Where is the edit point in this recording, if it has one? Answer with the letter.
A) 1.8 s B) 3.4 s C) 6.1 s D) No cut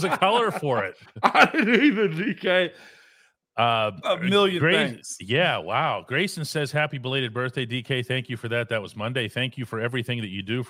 D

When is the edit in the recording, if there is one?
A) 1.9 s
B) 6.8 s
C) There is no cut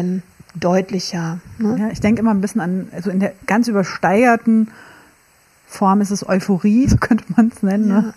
B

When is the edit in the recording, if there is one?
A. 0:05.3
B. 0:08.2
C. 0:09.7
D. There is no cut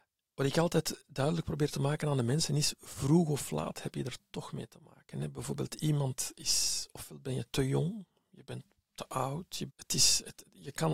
C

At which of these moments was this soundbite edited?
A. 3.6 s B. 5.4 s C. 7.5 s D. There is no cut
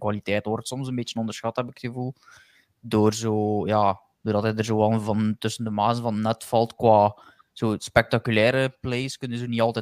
D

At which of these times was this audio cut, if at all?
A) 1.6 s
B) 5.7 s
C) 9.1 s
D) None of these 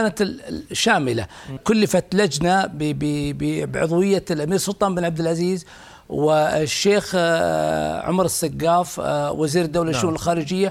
A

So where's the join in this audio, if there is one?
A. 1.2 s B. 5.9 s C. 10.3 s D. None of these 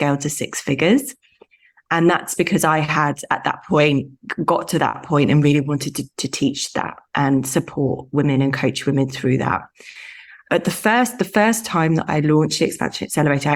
D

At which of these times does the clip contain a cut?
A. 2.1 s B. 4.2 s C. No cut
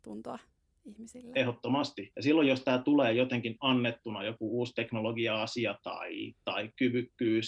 A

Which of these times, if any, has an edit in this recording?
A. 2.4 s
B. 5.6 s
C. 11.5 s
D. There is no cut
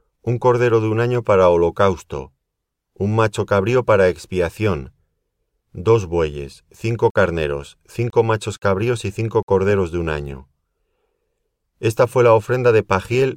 B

